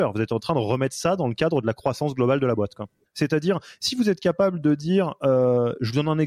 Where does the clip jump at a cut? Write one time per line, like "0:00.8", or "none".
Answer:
0:03.0

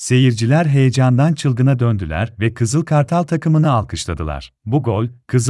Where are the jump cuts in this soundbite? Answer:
0:04.6

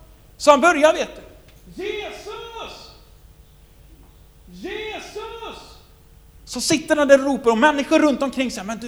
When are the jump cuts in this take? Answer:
none

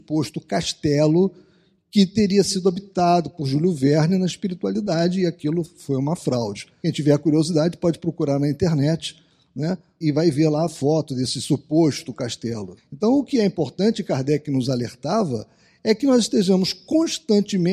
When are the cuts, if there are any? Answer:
0:06.8
0:10.0
0:12.8

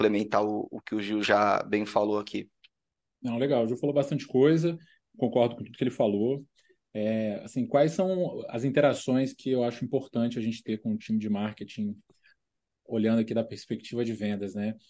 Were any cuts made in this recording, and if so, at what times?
none

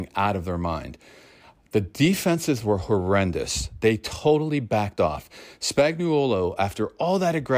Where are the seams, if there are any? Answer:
none

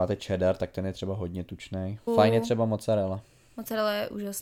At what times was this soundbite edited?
0:02.1

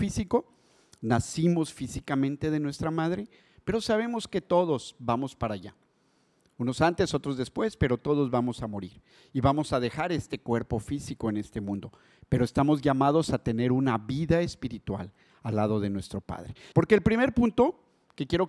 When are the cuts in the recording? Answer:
0:16.7

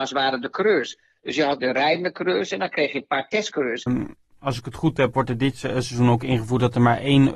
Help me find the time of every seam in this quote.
0:01.6
0:03.9

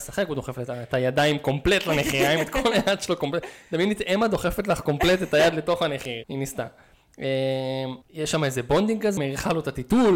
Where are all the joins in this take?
0:06.2
0:08.0
0:09.2

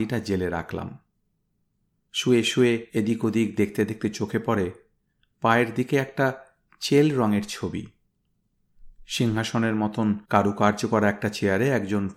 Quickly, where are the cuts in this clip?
0:02.9
0:10.2

